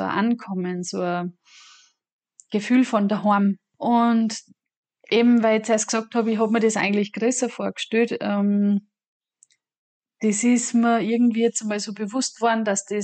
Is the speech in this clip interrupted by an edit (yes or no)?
no